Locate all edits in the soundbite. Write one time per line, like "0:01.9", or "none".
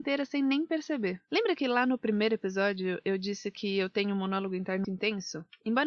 0:04.8